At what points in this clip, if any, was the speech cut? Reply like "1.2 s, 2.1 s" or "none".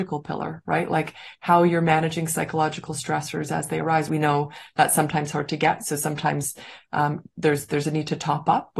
4.1 s